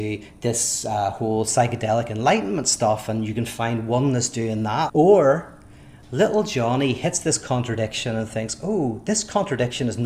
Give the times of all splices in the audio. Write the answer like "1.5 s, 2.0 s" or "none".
4.9 s